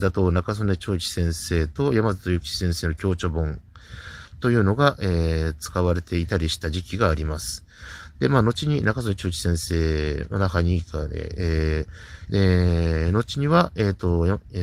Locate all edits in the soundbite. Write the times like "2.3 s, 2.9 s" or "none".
8.1 s, 12.3 s